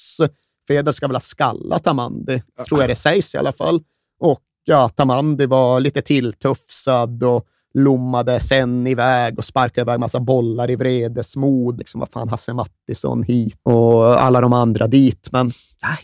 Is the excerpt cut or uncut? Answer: cut